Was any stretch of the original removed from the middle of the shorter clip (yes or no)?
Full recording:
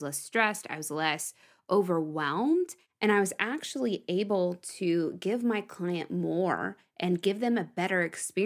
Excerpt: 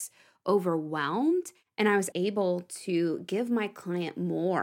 yes